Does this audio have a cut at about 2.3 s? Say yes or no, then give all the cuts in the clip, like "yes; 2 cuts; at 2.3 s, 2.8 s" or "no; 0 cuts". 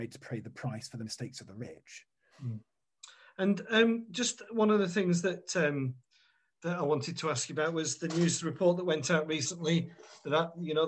yes; 1 cut; at 2.3 s